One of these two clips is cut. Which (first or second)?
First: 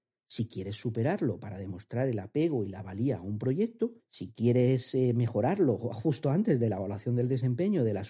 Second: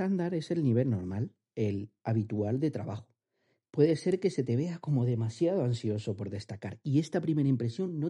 second